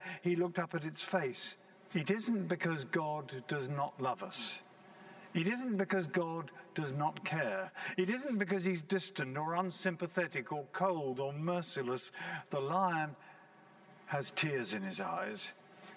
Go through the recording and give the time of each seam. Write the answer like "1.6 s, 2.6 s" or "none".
1.9 s